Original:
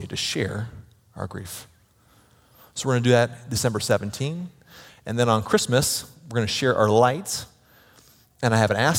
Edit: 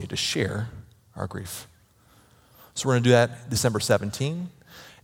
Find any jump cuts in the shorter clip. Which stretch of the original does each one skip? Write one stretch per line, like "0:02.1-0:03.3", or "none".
none